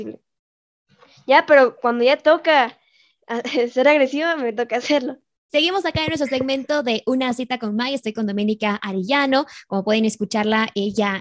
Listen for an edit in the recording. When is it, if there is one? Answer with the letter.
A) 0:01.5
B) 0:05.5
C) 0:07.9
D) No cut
B